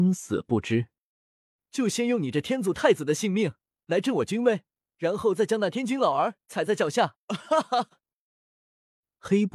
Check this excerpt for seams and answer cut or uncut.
uncut